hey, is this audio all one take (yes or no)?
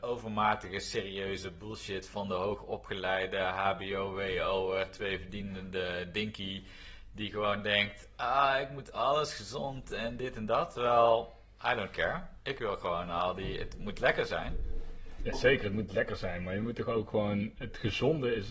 yes